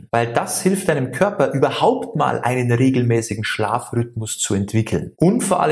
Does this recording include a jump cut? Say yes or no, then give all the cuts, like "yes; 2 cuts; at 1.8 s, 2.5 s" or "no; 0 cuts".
no; 0 cuts